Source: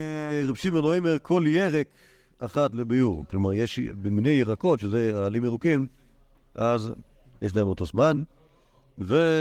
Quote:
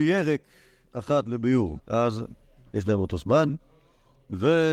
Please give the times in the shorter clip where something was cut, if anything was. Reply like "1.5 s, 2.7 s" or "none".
1.8 s